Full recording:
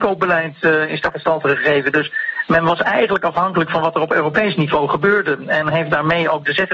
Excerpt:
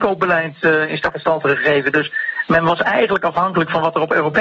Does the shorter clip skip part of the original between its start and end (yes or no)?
no